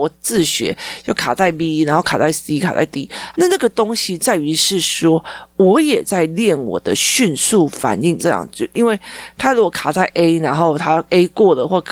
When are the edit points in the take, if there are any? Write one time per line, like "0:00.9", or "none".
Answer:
0:03.3
0:08.2